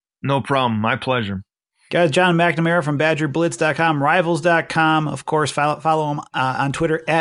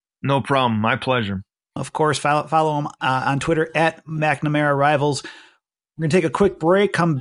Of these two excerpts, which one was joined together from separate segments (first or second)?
second